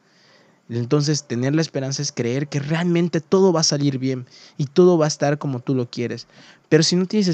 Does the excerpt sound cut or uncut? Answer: uncut